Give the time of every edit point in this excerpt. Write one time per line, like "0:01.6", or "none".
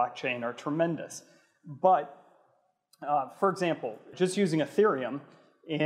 0:04.1